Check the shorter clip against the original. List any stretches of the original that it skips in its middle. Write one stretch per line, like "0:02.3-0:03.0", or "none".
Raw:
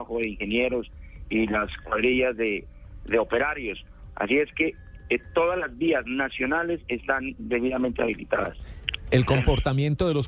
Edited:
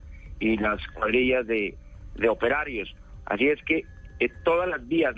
none

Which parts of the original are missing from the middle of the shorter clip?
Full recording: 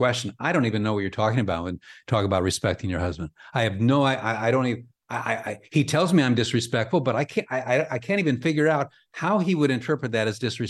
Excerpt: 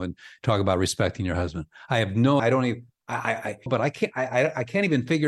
0:04.0-0:04.4
0:05.7-0:07.0

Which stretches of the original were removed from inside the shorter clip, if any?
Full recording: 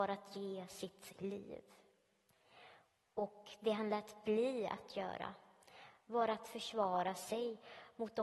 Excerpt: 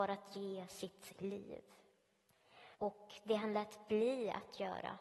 0:02.7-0:03.1

